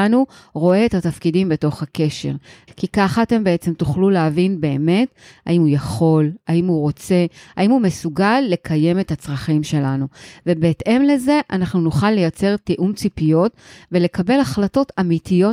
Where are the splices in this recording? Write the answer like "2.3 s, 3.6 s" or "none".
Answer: 2.7 s